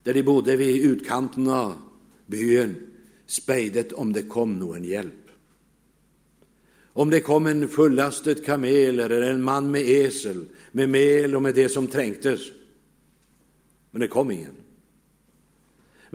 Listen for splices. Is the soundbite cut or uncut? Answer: uncut